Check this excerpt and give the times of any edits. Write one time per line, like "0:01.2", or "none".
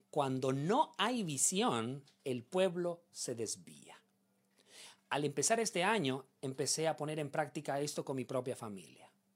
none